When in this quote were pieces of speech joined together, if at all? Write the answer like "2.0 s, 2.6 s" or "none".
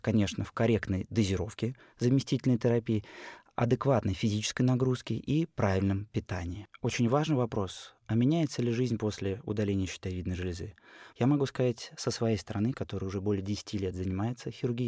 11.1 s, 12.7 s